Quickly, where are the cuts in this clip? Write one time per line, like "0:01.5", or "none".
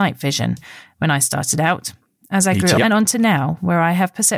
0:02.8